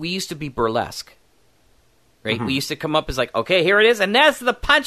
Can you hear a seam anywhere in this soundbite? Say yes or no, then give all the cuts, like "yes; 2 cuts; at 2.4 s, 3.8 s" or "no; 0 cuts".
no; 0 cuts